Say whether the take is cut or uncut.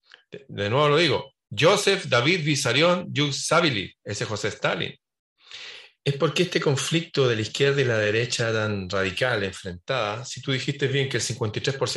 cut